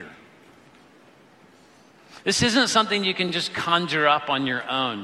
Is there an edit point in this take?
no; 0 cuts

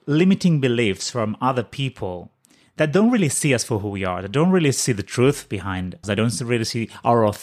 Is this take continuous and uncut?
no; 1 cut; at 6.0 s

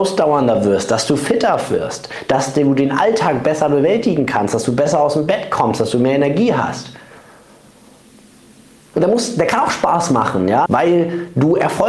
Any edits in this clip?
yes; 2 cuts; at 8.9 s, 10.7 s

